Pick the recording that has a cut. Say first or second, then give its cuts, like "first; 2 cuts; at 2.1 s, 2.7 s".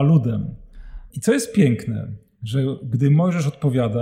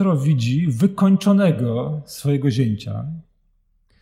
first; 1 cut; at 1.1 s